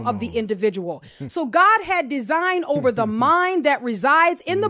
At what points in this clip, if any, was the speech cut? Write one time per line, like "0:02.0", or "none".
none